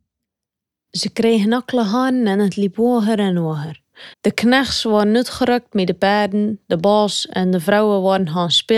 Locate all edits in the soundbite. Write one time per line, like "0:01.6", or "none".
0:04.1